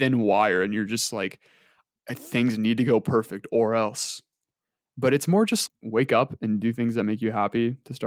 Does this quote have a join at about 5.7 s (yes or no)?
yes